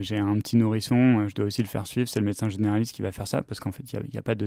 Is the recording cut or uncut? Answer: uncut